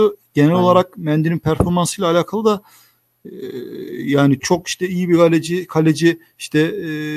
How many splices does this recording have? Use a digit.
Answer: 1